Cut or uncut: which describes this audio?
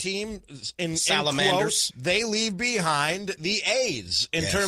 cut